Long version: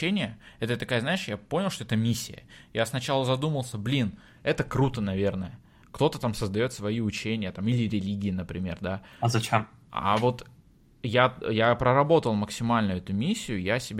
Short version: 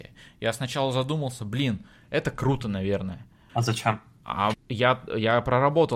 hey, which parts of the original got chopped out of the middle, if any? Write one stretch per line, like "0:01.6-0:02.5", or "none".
0:05.8-0:09.2
0:10.2-0:10.9